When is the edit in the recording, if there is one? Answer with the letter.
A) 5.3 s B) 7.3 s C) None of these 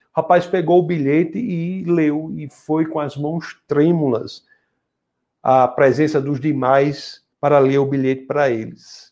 B